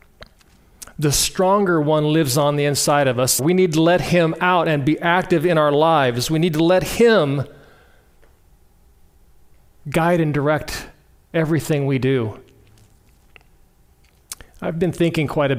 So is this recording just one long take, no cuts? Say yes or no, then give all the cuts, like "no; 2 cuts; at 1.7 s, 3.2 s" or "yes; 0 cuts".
no; 1 cut; at 3.4 s